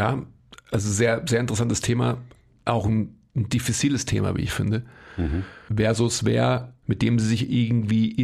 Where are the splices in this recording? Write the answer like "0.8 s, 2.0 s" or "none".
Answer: 5.7 s, 6.8 s